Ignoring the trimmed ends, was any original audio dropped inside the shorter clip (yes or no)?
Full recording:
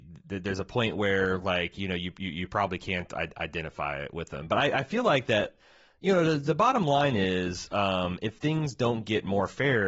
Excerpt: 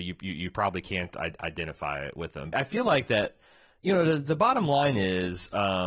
yes